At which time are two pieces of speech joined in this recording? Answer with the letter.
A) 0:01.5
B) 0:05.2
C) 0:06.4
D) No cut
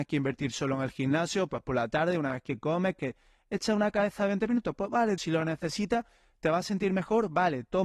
B